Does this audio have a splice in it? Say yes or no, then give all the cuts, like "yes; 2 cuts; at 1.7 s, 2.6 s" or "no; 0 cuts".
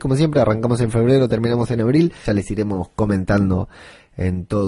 yes; 1 cut; at 2.2 s